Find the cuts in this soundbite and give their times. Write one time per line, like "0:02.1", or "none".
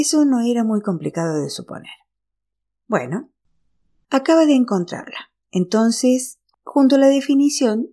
none